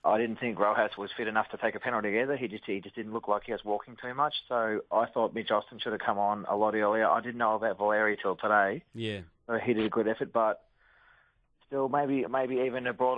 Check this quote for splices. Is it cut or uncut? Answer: cut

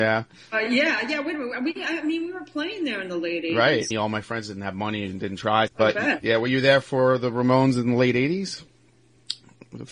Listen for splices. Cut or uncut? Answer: cut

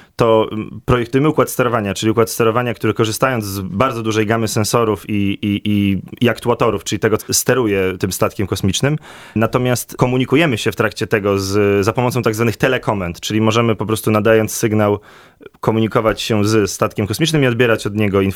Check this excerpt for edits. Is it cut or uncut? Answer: cut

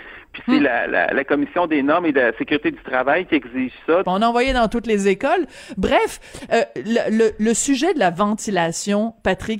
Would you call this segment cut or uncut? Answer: cut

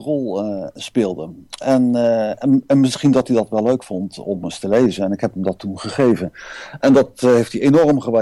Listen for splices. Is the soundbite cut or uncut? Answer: uncut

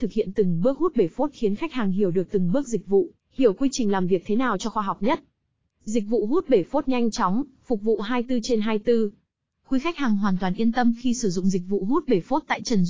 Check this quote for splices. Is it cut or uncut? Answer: uncut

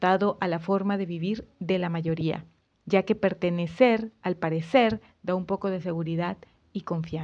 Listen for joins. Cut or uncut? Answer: cut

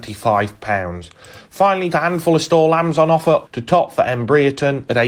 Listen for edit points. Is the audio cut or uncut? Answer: cut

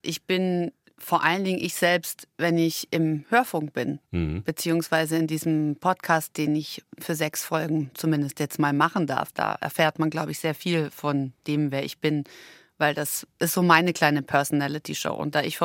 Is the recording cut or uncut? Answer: uncut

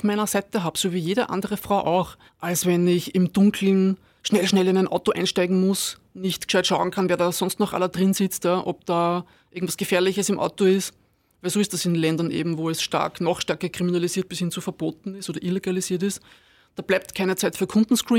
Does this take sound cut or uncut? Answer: cut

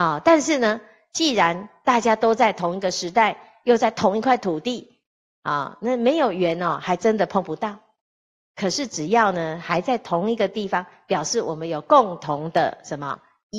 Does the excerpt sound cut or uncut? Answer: uncut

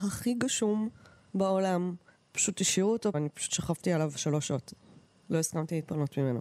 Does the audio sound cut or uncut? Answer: cut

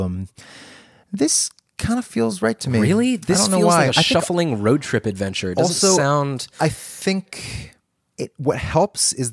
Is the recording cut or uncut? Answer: uncut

